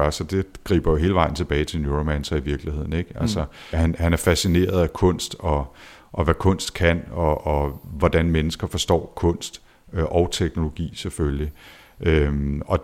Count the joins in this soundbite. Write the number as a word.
one